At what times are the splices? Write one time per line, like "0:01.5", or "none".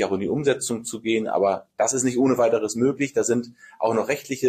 none